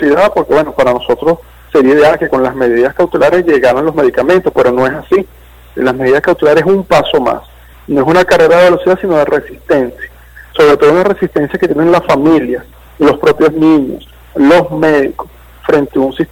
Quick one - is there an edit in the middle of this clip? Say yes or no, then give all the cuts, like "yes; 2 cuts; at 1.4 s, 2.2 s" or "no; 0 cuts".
no; 0 cuts